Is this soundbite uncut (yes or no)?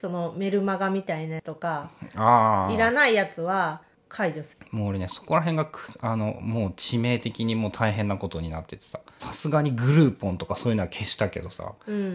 yes